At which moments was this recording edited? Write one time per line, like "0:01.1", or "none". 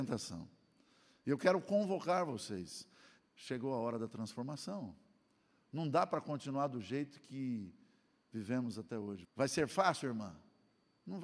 0:03.2
0:09.2